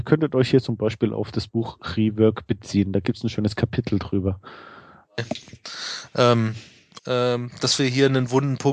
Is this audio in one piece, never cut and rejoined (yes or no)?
no